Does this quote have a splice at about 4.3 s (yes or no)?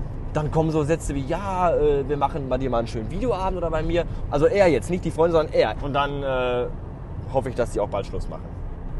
yes